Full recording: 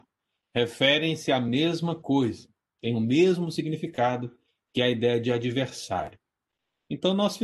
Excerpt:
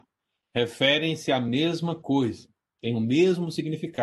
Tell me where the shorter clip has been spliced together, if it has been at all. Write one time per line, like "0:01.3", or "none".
none